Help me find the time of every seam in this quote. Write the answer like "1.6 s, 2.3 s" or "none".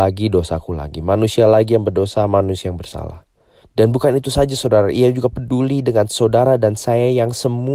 3.6 s